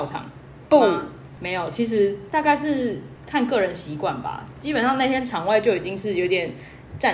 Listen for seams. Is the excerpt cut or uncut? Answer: uncut